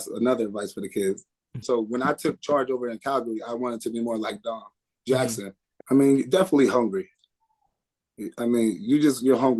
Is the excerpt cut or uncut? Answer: cut